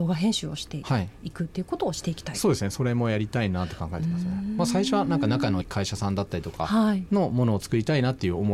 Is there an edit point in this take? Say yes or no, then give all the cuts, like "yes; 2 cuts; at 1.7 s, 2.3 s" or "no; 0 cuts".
yes; 1 cut; at 5.6 s